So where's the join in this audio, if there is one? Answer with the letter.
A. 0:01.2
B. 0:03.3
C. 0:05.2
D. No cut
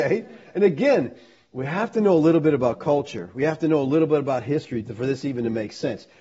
D